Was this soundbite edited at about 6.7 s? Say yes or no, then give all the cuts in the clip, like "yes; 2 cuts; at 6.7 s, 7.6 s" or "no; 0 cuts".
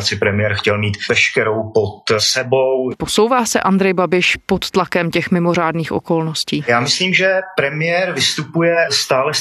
no; 1 cut; at 2.9 s